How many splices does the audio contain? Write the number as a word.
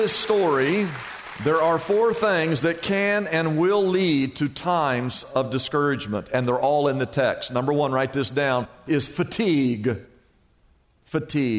zero